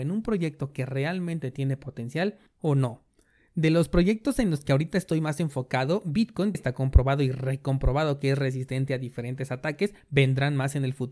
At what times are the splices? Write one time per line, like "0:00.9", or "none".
0:06.5